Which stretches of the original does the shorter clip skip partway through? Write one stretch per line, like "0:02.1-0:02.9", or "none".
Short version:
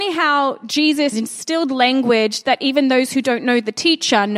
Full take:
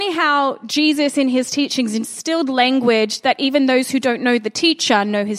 0:01.1-0:01.9